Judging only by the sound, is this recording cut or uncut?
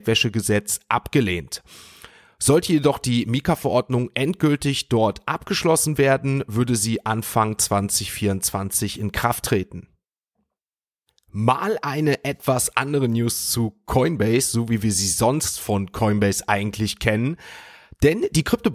uncut